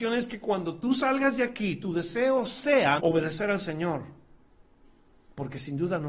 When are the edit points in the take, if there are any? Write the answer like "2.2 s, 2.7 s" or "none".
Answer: 3.0 s